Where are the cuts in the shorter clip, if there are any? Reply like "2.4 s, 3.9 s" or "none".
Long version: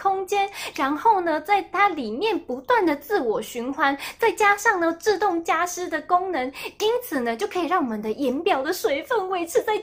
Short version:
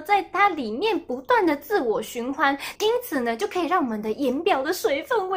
2.8 s